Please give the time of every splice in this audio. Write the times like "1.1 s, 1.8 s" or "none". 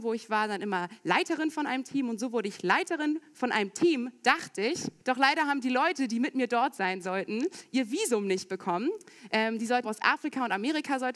5.0 s, 9.8 s